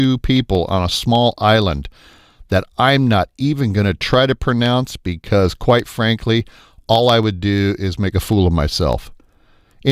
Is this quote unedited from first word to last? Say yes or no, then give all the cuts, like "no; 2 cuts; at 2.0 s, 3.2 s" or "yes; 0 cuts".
yes; 0 cuts